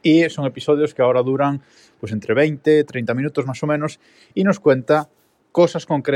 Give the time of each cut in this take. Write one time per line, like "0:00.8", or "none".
none

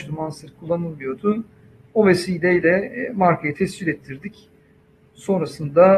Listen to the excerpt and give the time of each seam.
none

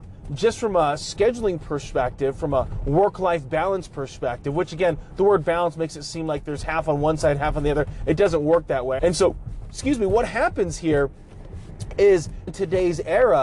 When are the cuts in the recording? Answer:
0:09.0
0:12.5

